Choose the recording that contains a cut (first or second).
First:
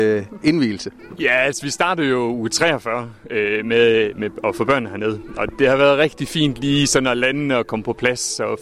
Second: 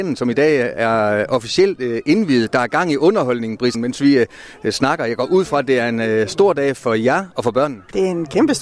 second